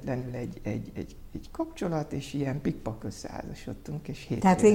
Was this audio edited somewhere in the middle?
no; 0 cuts

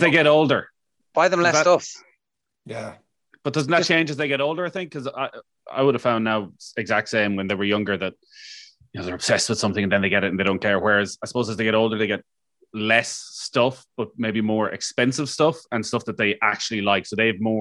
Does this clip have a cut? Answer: no; 0 cuts

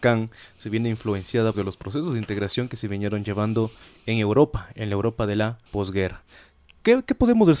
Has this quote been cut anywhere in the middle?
yes; 2 cuts; at 1.5 s, 5.7 s

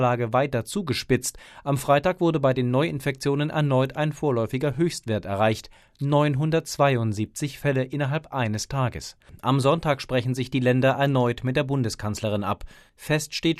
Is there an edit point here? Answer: no; 0 cuts

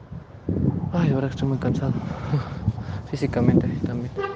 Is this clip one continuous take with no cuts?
yes; 0 cuts

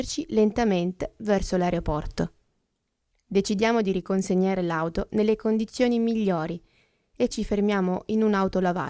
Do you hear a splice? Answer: yes; 1 cut; at 7.3 s

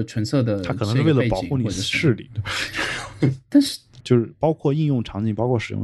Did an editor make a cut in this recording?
yes; 1 cut; at 4.0 s

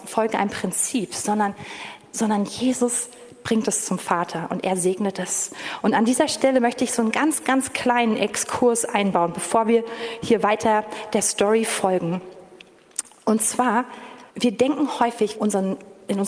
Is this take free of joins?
no; 2 cuts; at 14.3 s, 15.3 s

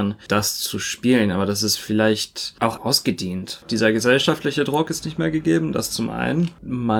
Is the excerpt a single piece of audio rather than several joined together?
no; 1 cut; at 2.8 s

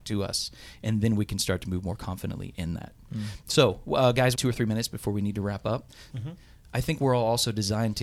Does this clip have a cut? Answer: yes; 2 cuts; at 4.3 s, 6.1 s

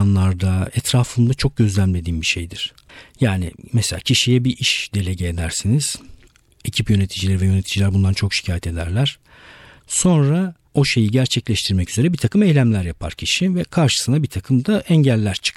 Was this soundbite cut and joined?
no; 0 cuts

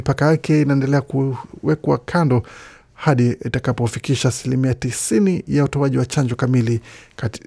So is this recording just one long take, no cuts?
yes; 0 cuts

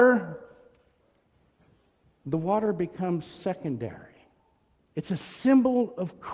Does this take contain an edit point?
yes; 1 cut; at 4.8 s

